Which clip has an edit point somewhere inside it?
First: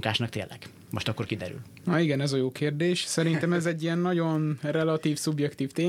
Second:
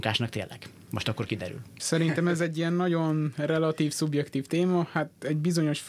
second; 1 cut; at 1.8 s

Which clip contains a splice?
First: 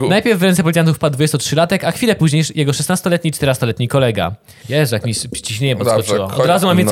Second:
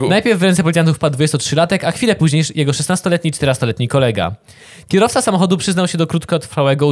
first; 1 cut; at 4.6 s

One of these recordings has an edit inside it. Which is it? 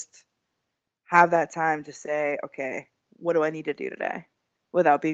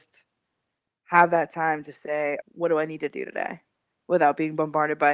second; 1 cut; at 2.4 s

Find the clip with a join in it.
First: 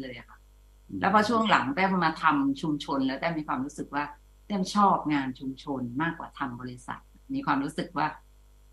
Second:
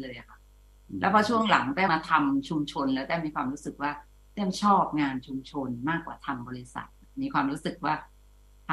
second; 1 cut; at 1.9 s

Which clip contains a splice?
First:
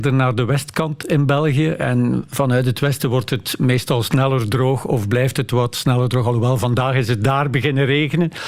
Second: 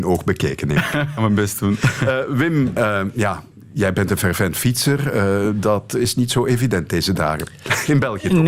second; 1 cut; at 1.2 s

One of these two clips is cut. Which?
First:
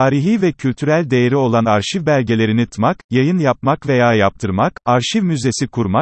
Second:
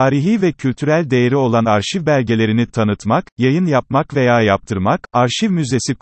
first; 1 cut; at 2.7 s

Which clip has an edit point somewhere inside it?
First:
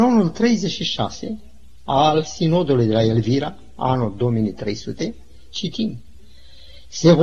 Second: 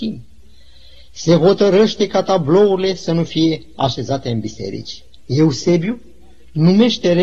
second; 1 cut; at 5.2 s

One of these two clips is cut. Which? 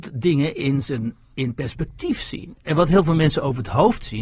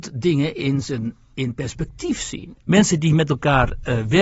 second; 1 cut; at 2.6 s

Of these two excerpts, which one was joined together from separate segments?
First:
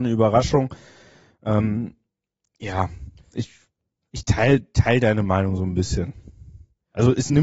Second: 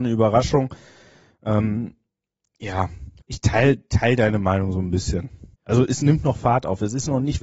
second; 2 cuts; at 3.2 s, 5.5 s

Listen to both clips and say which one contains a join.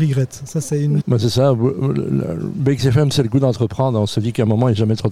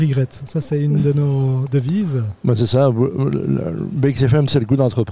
first; 1 cut; at 1.0 s

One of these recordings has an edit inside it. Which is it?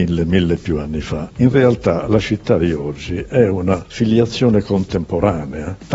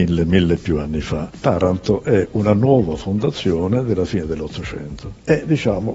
second; 1 cut; at 1.3 s

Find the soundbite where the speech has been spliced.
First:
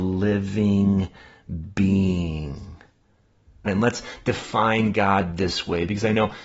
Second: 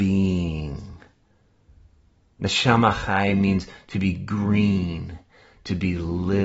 first; 1 cut; at 3.7 s

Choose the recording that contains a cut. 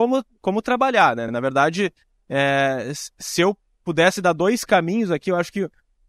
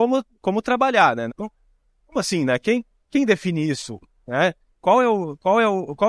second; 1 cut; at 1.3 s

